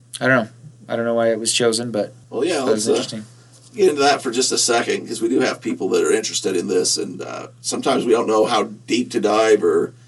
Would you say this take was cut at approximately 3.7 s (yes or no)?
no